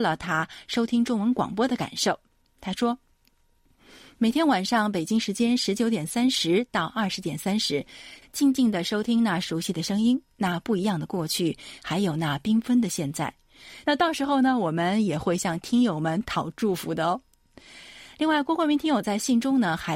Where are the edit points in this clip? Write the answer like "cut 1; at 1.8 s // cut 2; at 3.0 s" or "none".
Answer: cut 1; at 8.2 s // cut 2; at 13.8 s